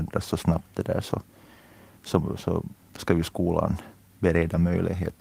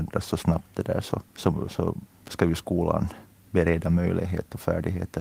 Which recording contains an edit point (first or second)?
second